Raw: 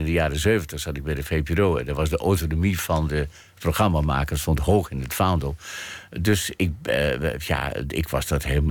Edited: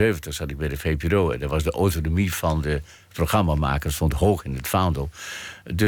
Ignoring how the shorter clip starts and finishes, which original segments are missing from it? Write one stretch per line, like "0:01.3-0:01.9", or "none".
none

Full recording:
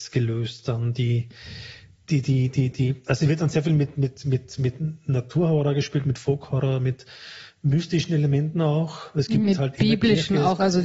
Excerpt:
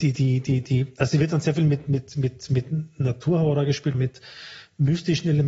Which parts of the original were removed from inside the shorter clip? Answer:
0:06.0-0:06.8

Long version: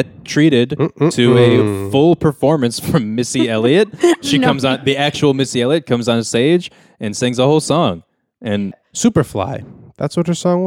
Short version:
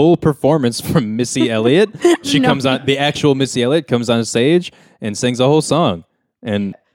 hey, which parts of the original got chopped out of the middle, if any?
none

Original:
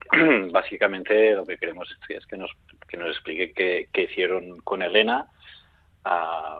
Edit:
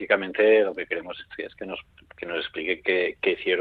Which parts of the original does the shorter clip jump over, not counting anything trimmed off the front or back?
none

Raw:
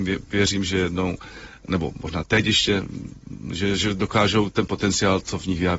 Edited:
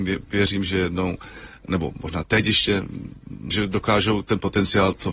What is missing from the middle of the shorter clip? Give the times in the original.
0:03.5-0:03.8

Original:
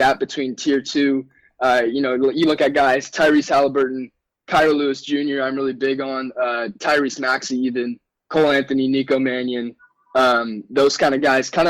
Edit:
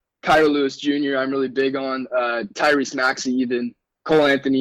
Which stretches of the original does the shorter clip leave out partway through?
none

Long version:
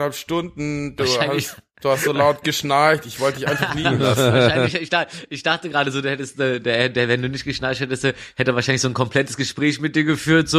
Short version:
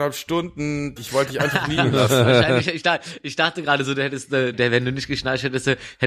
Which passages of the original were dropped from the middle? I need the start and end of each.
0:01.0-0:03.0
0:06.6-0:06.9

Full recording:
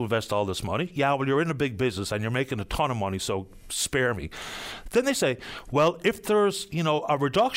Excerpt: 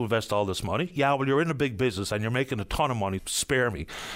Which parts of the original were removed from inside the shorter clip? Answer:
0:03.2-0:03.6

